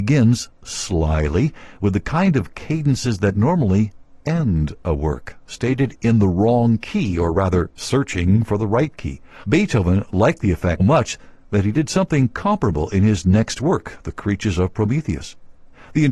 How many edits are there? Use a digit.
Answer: 2